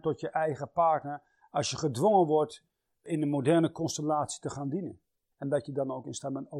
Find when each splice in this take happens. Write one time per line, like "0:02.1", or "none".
0:05.3